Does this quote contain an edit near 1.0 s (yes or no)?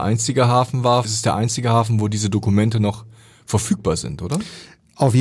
yes